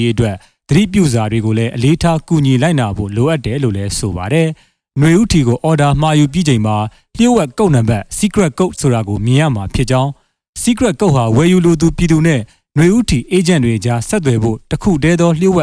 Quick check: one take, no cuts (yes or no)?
yes